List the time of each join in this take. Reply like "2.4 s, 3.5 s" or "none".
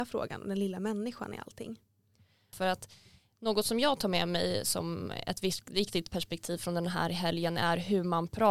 2.5 s